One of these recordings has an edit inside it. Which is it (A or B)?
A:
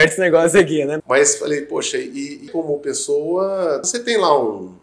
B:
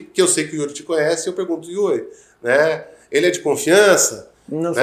A